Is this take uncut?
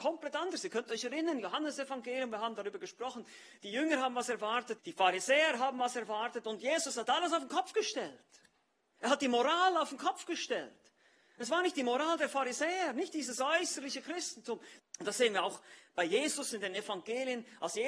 no; 2 cuts; at 4.8 s, 14.8 s

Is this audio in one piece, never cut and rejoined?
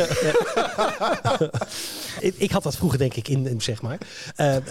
no; 2 cuts; at 2.2 s, 3.6 s

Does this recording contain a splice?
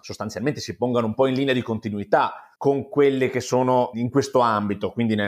yes; 2 cuts; at 2.6 s, 3.9 s

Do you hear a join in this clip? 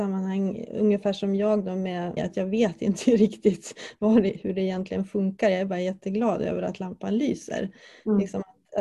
yes; 1 cut; at 2.2 s

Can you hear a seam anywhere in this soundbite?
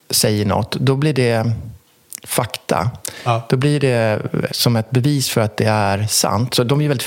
yes; 1 cut; at 4.5 s

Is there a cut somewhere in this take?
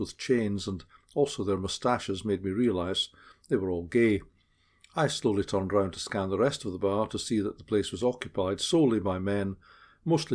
no; 0 cuts

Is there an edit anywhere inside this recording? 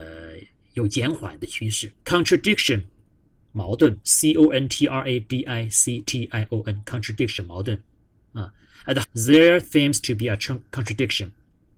yes; 2 cuts; at 2.0 s, 9.0 s

